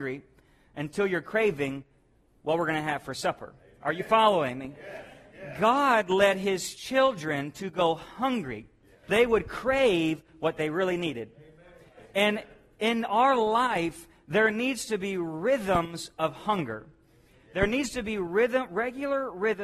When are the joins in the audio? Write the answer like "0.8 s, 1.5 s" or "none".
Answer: 9.1 s